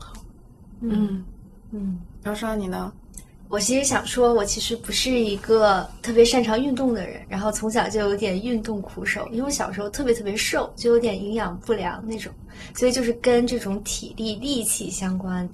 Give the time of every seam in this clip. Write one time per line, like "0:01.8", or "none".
0:02.2